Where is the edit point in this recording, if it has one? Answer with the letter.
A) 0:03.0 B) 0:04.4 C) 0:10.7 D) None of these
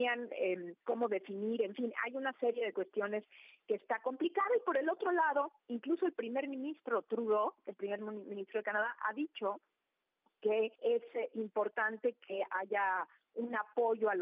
C